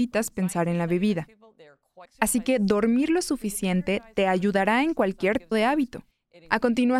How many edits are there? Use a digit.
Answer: 2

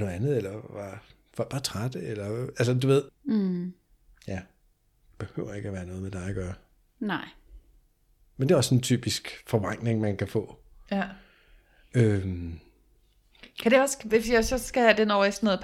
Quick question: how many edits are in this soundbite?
1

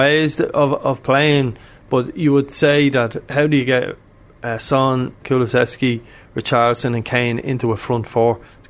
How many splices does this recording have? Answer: 1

